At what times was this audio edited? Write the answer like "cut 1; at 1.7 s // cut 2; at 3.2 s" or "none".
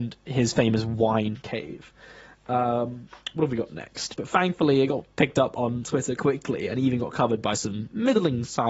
cut 1; at 4.2 s // cut 2; at 6.2 s